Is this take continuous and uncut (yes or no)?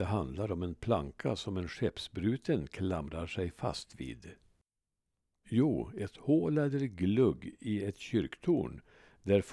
no